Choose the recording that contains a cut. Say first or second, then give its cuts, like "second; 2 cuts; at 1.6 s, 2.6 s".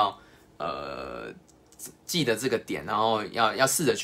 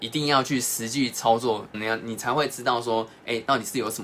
second; 1 cut; at 1.7 s